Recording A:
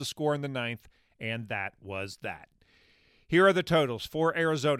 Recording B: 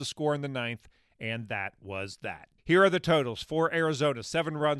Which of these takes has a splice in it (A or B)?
B